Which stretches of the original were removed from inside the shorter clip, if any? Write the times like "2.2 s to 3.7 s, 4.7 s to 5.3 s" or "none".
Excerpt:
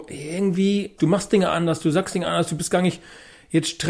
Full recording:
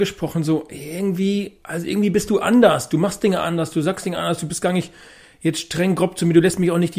1.6 s to 2.9 s

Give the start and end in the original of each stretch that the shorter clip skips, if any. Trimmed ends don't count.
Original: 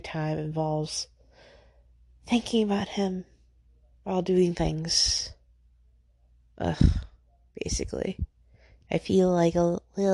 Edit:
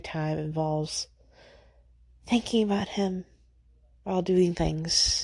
none

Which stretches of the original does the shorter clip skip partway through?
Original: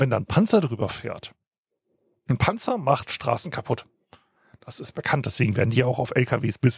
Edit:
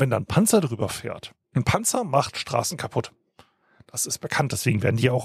1.4 s to 2.2 s

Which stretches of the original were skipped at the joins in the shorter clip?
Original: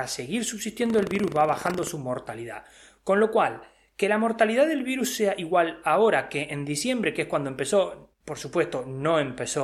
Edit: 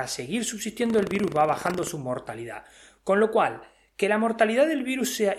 none

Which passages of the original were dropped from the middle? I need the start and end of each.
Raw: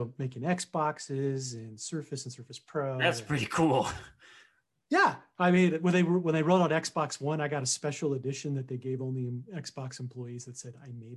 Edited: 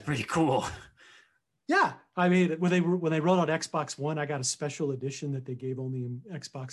none

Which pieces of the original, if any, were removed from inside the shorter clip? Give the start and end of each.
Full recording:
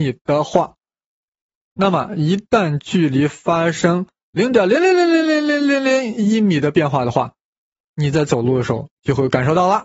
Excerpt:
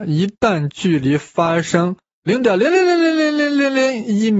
none

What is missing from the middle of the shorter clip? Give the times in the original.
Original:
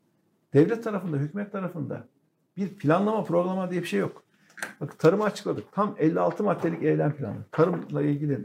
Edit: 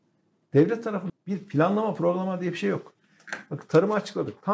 1.1 s to 2.4 s

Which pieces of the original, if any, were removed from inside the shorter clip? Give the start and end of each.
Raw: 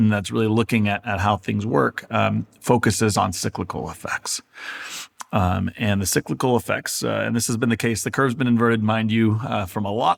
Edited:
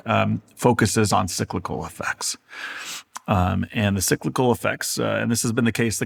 none

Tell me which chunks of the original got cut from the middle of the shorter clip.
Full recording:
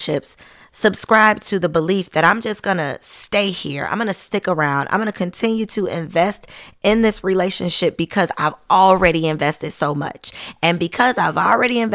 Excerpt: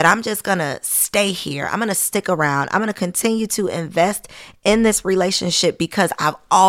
none

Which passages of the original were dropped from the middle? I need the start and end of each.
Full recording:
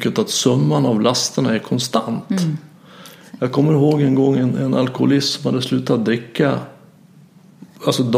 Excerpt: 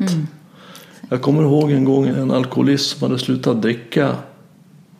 4.4 s to 4.5 s

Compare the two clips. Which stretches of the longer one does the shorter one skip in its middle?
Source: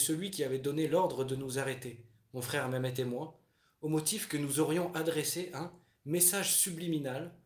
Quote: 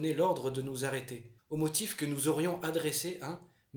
2.1 s to 3.7 s

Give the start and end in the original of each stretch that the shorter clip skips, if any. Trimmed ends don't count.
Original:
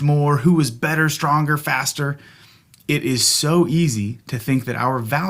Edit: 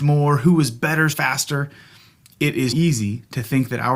1.1 s to 1.6 s, 3.2 s to 3.7 s

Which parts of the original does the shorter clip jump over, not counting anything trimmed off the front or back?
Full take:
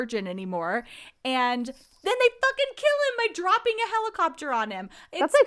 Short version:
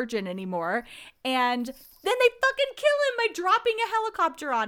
none

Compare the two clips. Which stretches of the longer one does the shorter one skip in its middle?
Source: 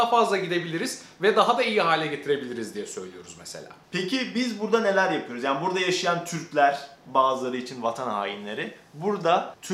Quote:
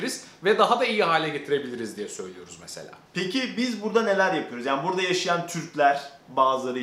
none

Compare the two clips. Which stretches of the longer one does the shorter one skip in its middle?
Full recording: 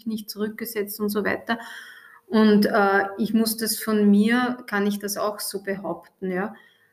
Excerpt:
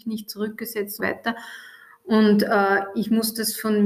1.0 s to 1.2 s

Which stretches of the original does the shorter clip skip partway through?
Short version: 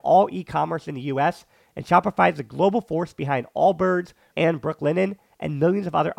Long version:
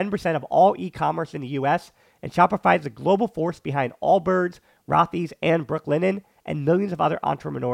4.8 s to 5.4 s

